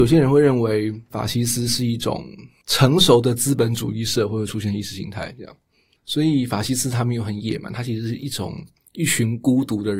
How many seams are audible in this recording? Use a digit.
0